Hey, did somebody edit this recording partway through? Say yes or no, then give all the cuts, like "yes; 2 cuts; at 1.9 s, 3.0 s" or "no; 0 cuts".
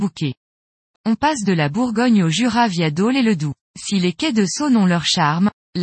yes; 2 cuts; at 1.0 s, 3.7 s